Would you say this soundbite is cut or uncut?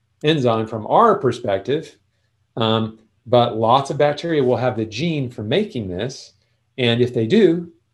uncut